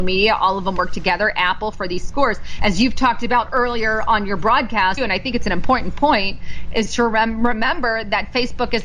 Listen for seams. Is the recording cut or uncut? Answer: cut